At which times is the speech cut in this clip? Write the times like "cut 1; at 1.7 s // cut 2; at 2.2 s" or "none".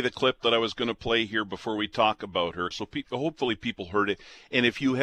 cut 1; at 2.7 s